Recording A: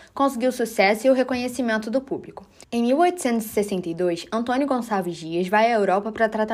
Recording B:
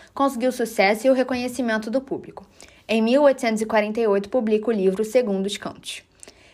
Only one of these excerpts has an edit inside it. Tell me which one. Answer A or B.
A